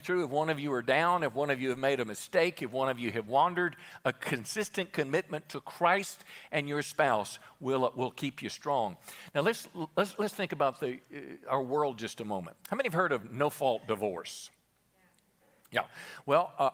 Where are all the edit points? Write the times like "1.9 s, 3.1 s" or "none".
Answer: none